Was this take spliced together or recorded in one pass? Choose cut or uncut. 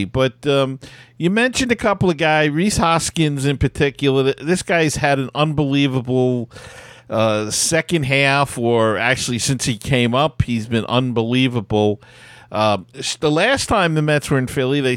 uncut